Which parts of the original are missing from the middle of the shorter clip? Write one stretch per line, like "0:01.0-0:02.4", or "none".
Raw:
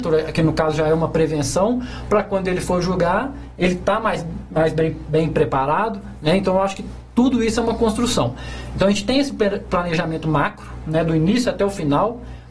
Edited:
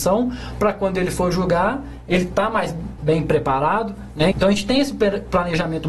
0:04.5-0:05.0
0:06.4-0:08.7